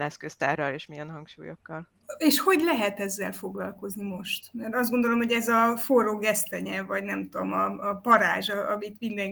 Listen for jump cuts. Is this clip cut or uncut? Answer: uncut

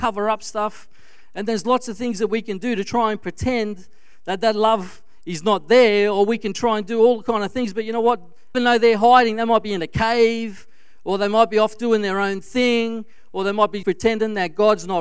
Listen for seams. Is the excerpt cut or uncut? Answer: cut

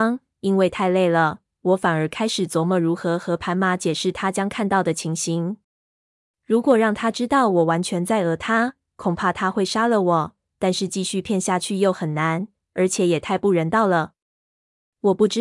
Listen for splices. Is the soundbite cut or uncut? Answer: uncut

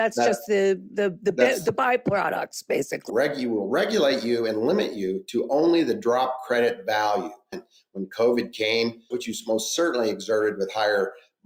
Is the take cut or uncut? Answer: cut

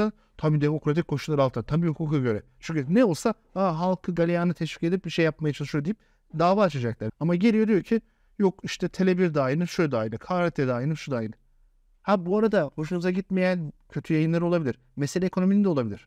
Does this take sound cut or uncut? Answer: cut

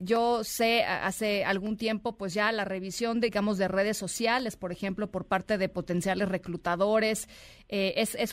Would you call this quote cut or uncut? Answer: uncut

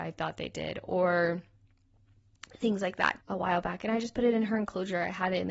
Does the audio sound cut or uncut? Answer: cut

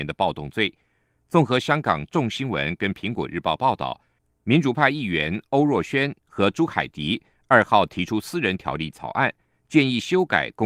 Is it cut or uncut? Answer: uncut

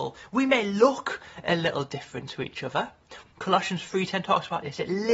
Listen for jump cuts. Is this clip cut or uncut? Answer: cut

